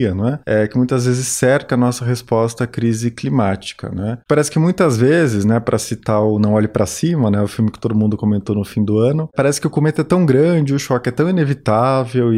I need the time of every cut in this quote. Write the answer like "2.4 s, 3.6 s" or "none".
none